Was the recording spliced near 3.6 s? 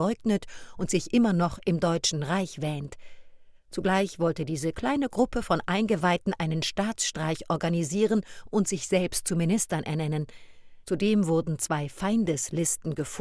no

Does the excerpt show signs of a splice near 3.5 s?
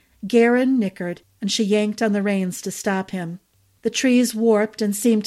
no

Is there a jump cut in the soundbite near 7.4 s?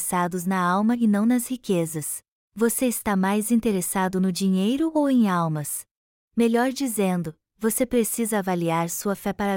no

